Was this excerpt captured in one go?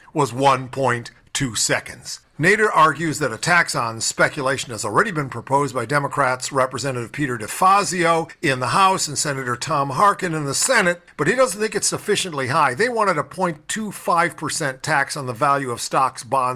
yes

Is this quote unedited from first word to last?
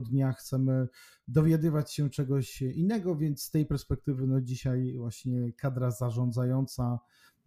yes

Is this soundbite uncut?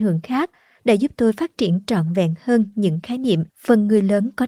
no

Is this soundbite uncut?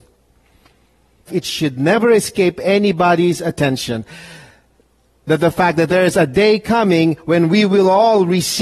no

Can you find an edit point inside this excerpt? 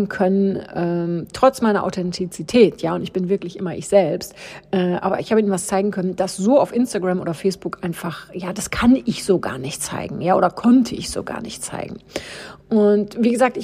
no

